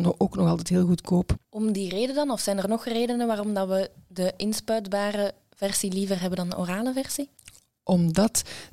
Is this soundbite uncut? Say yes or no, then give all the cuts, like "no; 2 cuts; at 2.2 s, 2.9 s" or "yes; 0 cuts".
no; 1 cut; at 1.4 s